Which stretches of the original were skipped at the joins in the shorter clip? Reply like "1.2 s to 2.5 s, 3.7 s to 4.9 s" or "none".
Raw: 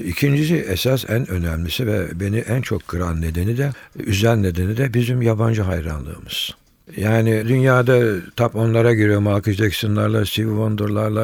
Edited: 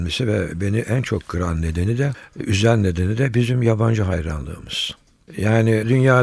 none